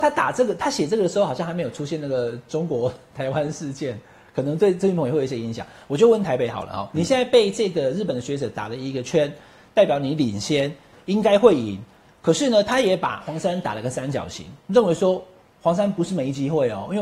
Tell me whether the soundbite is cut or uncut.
uncut